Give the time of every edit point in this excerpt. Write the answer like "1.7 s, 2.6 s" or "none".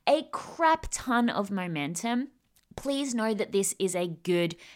none